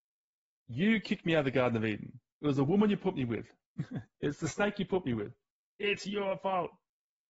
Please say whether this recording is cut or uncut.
uncut